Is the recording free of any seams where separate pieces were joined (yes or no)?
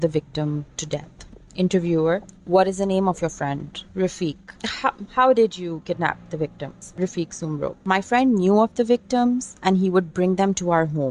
no